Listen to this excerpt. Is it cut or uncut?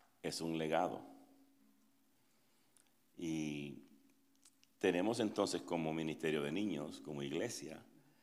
uncut